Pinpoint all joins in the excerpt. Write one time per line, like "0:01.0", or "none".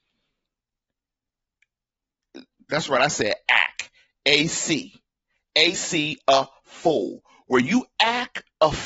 0:02.7
0:05.7